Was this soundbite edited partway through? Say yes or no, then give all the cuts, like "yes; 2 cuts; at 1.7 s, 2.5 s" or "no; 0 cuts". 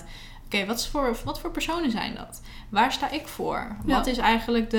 no; 0 cuts